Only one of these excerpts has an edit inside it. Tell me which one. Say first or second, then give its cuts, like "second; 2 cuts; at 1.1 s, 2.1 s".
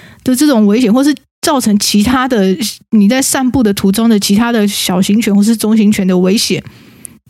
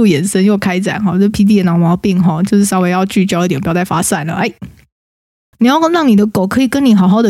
second; 1 cut; at 5.5 s